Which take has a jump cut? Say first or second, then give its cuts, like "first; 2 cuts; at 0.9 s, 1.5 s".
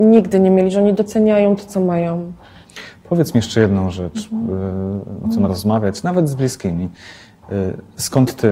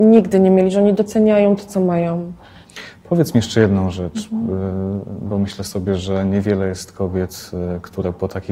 first; 1 cut; at 5.2 s